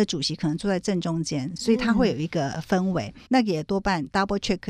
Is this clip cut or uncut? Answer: cut